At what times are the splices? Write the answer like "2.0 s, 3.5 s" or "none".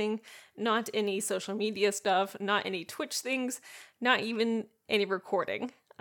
none